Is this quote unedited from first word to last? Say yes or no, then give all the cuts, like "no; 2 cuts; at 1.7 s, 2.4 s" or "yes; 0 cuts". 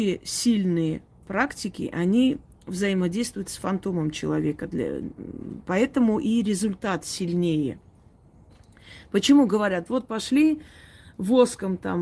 yes; 0 cuts